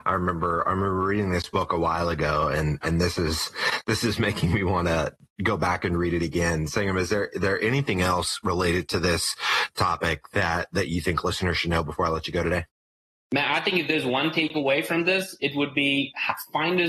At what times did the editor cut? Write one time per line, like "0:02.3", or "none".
none